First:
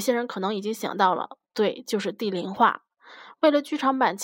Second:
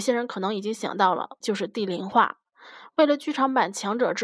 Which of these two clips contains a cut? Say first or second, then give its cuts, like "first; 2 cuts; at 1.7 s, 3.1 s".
second; 1 cut; at 1.4 s